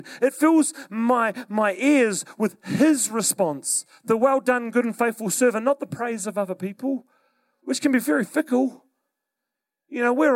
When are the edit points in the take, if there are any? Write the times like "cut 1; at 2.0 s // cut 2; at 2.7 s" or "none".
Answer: none